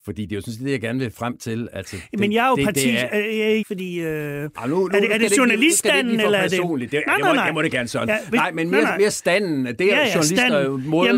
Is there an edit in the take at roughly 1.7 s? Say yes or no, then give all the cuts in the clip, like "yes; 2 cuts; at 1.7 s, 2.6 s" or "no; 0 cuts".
no; 1 cut; at 3.6 s